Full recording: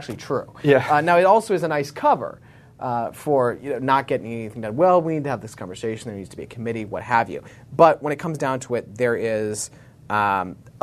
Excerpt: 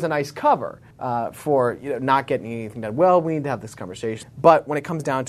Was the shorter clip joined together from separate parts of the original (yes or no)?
yes